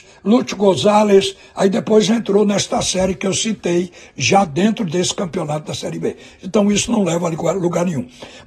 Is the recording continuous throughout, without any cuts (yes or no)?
yes